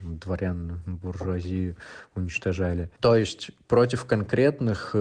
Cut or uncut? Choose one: uncut